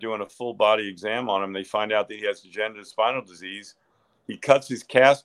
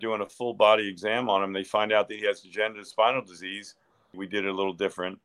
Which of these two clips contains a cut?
second; 1 cut; at 4.1 s

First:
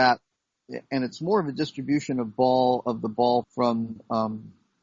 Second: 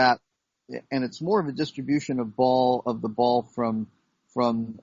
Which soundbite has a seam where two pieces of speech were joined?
first; 1 cut; at 3.4 s

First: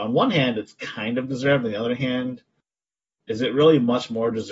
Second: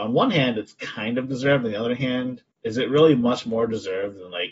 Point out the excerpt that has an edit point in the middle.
second; 1 cut; at 2.5 s

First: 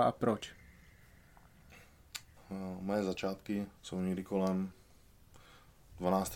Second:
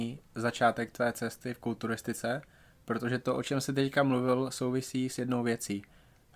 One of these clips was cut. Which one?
first; 2 cuts; at 2.4 s, 3.8 s

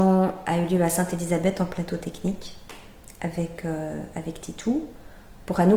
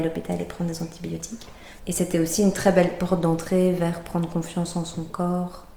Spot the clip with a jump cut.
second; 1 cut; at 1.8 s

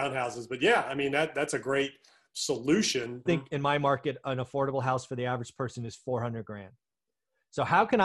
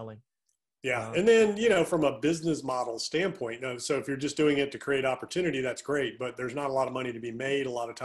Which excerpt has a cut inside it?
first; 1 cut; at 3.3 s

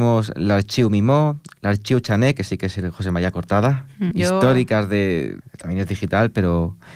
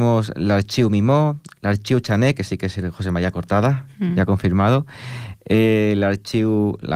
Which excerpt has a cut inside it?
first; 2 cuts; at 4.1 s, 5.4 s

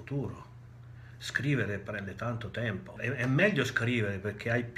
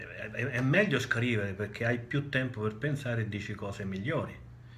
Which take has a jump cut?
first; 1 cut; at 3.0 s

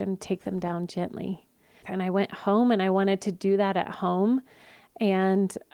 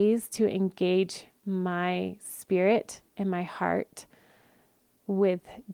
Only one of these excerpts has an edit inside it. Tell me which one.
first; 1 cut; at 1.8 s

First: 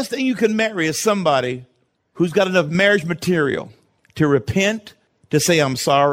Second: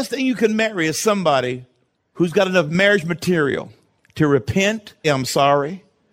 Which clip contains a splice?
second; 1 cut; at 5.0 s

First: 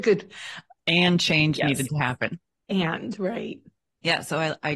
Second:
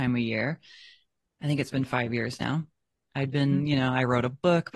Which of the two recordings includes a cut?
second; 1 cut; at 3.0 s

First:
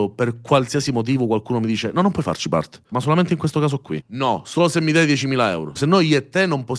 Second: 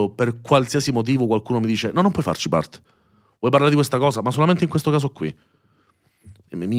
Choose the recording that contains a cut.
first; 3 cuts; at 2.9 s, 4.0 s, 5.8 s

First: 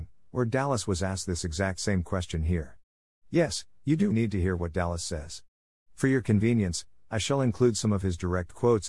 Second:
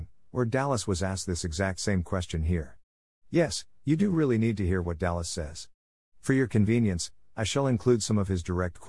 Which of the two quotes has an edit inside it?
first; 1 cut; at 4.1 s

